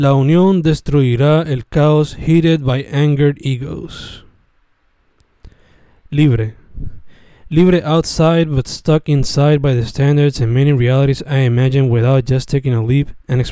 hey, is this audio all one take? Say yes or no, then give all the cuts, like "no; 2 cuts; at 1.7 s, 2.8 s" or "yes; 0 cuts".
yes; 0 cuts